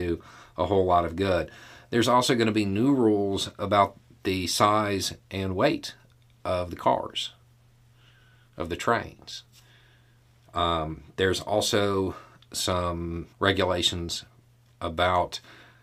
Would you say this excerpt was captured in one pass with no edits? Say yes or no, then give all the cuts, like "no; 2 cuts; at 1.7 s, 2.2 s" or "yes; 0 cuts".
no; 2 cuts; at 10.5 s, 13.3 s